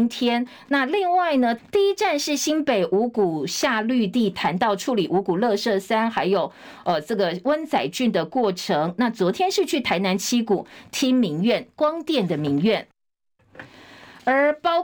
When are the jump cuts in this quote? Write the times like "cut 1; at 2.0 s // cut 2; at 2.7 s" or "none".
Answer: cut 1; at 1.6 s